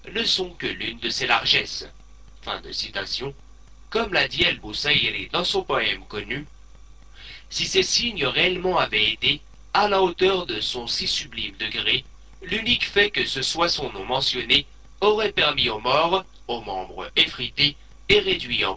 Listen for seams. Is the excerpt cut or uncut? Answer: uncut